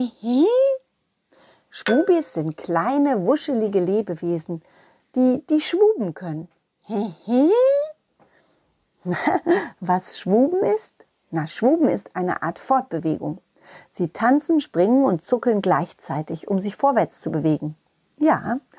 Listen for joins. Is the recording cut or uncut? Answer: uncut